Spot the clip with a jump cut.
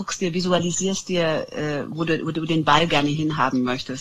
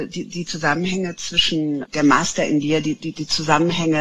second; 1 cut; at 1.8 s

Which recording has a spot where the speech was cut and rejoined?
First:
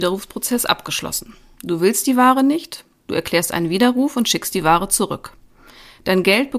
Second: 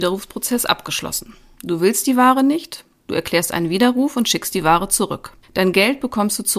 second; 1 cut; at 5.4 s

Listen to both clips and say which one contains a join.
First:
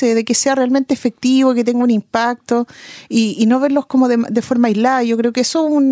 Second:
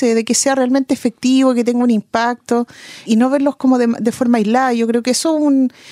second; 1 cut; at 3.0 s

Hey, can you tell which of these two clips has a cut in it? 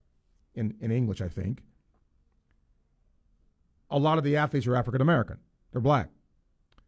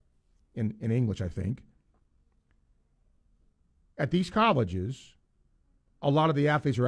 first; 1 cut; at 3.8 s

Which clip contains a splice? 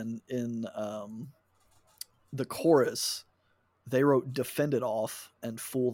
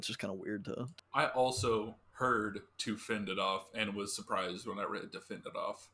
second; 1 cut; at 1.0 s

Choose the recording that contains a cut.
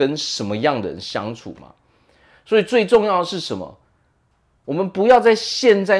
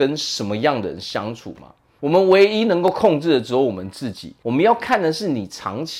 second; 2 cuts; at 2.0 s, 4.4 s

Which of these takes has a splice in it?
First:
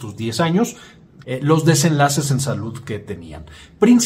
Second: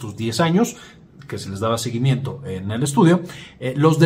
first; 1 cut; at 1.2 s

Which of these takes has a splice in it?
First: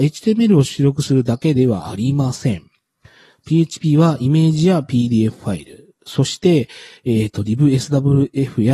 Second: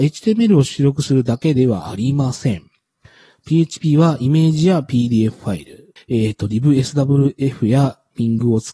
second; 1 cut; at 6.0 s

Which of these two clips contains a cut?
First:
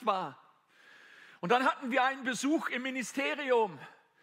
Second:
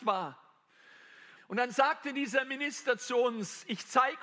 second; 1 cut; at 1.4 s

